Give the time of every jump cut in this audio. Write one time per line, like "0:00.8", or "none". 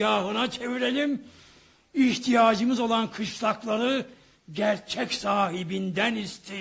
none